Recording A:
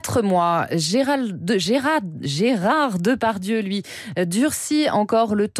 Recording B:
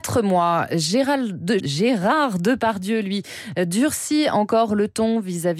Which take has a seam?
B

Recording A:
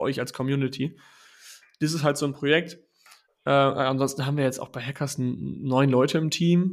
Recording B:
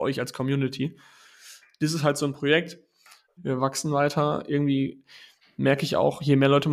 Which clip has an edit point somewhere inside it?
B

